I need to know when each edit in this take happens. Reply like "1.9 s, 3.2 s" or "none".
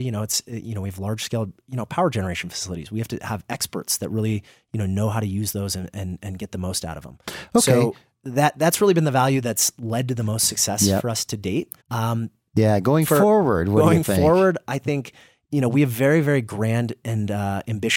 11.8 s